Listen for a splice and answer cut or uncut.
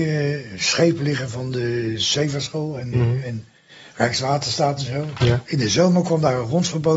cut